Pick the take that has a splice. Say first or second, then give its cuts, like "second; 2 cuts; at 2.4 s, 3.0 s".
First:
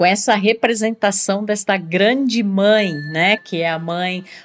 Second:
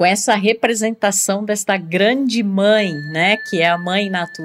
first; 1 cut; at 3.4 s